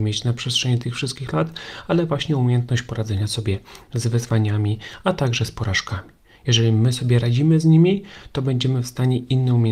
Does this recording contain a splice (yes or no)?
no